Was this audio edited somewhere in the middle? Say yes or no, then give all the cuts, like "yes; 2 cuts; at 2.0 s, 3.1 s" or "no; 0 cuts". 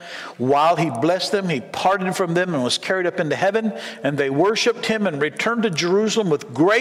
no; 0 cuts